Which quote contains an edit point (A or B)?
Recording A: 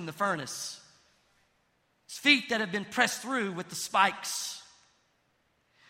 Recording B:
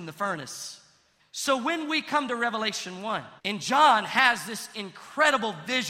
B